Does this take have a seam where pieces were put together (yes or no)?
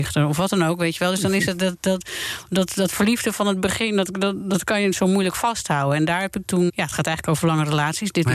yes